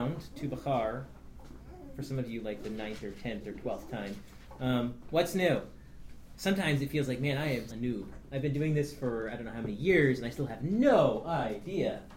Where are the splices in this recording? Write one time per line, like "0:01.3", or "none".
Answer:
0:06.3
0:07.7